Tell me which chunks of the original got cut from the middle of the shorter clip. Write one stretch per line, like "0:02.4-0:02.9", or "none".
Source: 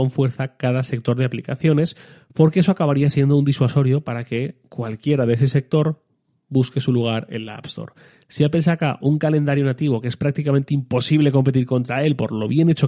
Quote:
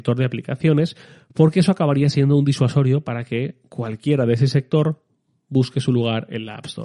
none